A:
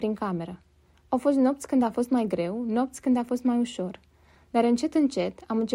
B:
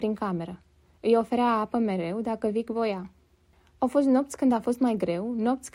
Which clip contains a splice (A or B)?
A